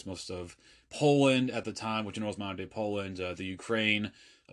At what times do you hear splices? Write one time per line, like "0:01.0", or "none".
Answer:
none